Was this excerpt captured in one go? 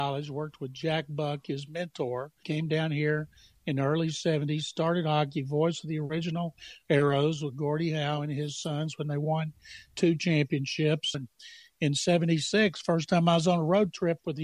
no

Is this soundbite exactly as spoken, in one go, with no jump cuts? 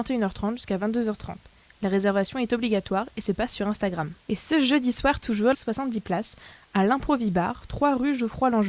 no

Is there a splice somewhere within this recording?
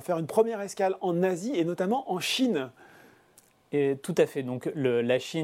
no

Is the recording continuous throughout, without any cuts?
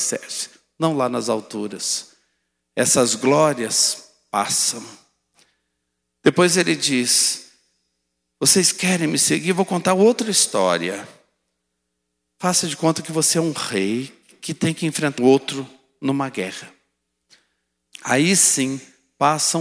no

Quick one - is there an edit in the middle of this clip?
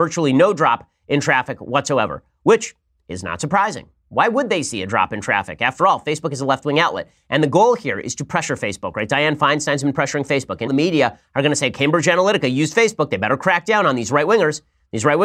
yes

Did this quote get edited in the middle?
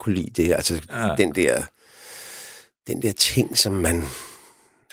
no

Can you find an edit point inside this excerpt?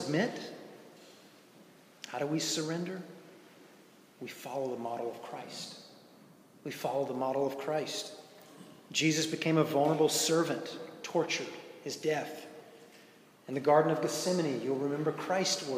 no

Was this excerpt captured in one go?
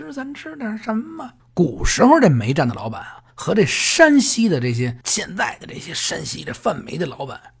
no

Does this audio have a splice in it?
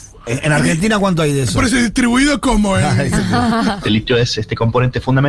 yes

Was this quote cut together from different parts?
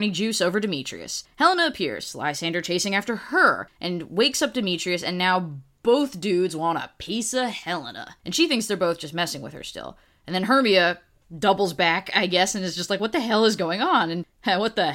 yes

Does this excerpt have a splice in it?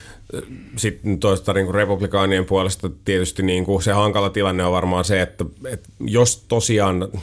no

